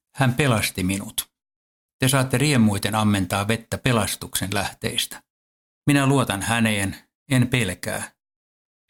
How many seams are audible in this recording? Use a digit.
1